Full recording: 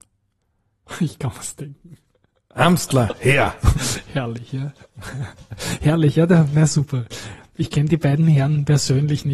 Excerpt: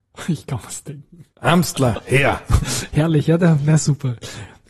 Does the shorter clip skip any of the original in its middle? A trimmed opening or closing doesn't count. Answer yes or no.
yes